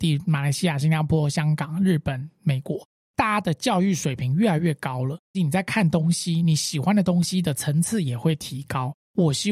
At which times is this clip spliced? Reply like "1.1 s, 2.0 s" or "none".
5.3 s

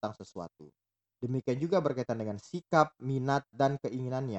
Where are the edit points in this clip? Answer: none

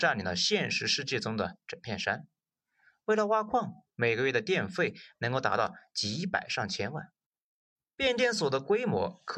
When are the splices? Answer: 3.8 s

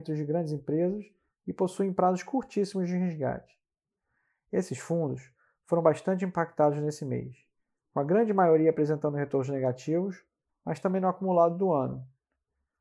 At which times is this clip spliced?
10.5 s

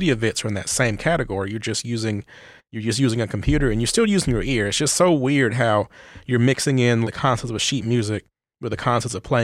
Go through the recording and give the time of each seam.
7.0 s

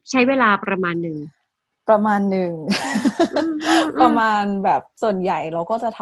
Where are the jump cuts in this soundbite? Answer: 4.9 s

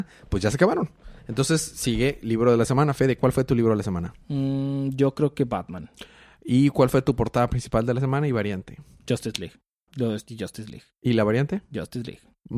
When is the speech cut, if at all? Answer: 9.9 s

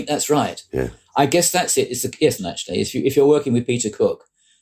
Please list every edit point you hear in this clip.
2.4 s

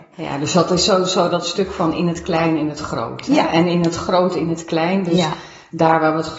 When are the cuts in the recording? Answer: none

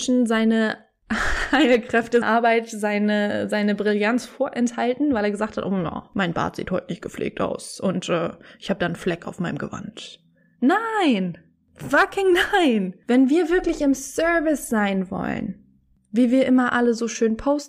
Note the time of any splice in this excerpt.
2.2 s

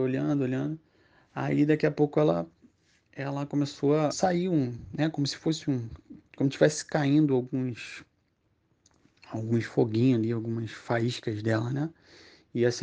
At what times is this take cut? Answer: 4.1 s

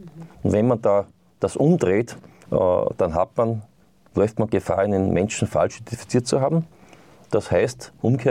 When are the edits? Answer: 2.4 s

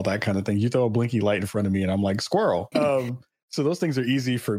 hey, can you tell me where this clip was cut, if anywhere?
2.7 s

